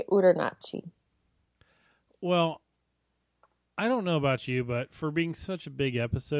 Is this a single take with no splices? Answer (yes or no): yes